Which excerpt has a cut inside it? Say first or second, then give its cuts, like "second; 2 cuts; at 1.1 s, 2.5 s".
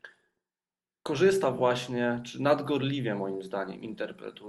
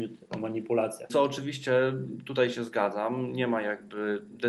second; 1 cut; at 1.1 s